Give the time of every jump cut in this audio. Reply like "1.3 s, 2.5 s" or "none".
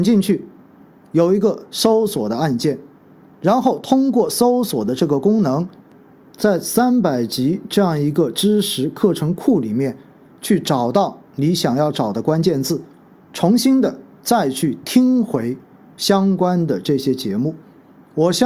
none